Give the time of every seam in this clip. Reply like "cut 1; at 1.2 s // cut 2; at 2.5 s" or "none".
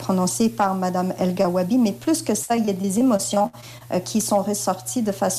none